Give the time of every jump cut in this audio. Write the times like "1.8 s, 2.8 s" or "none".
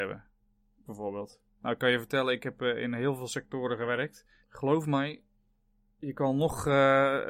1.6 s, 4.4 s

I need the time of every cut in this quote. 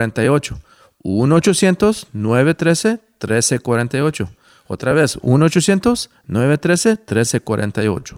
none

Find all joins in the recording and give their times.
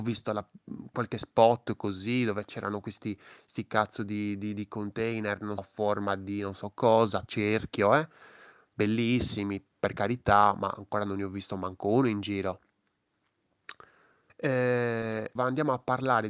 5.6 s, 14.3 s, 15.4 s

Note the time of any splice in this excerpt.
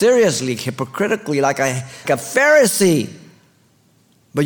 2.0 s

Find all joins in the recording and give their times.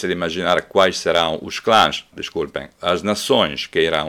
2.1 s

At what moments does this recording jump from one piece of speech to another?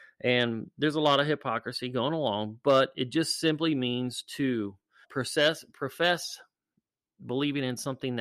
5.0 s

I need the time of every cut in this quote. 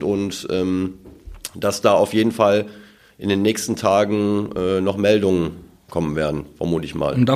none

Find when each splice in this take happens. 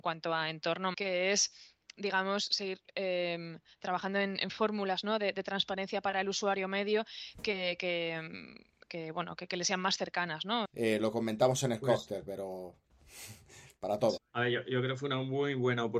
0.9 s, 10.6 s, 14.2 s

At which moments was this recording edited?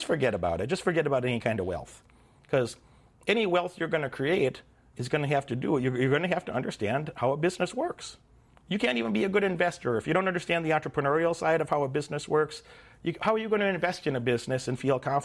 none

